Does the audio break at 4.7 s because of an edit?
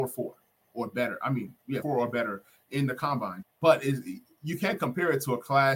no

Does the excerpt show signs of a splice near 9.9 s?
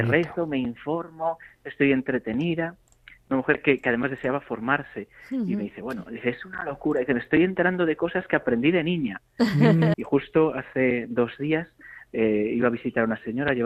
yes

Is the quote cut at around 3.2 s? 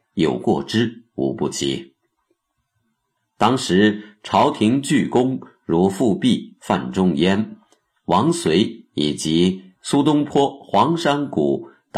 yes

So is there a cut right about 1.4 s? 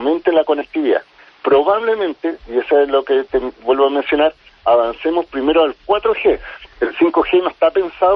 no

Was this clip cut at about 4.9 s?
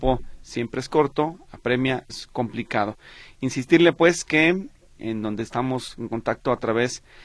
yes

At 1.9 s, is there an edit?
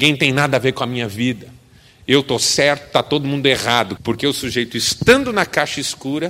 no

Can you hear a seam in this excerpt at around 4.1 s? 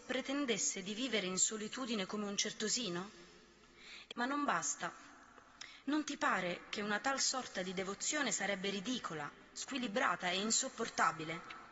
yes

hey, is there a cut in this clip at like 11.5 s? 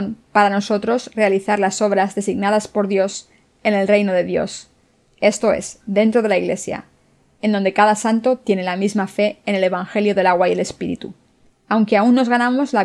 yes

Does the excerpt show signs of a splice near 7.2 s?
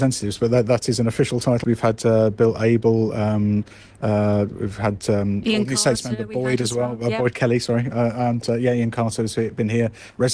no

